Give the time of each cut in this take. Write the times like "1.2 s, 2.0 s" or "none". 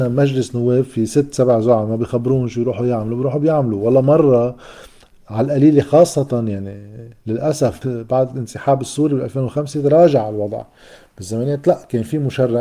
7.8 s